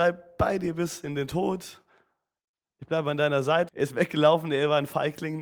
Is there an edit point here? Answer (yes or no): yes